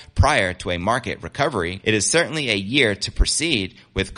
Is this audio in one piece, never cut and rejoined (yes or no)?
no